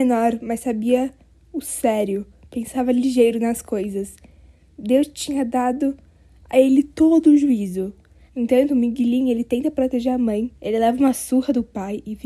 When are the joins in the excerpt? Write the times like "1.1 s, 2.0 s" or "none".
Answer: 8.3 s, 10.6 s